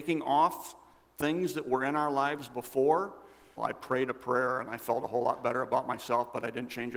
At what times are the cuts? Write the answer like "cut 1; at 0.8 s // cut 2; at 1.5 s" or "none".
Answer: cut 1; at 3.6 s